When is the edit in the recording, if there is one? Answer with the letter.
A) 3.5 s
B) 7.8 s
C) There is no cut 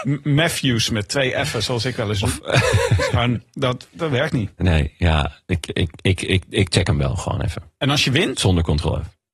C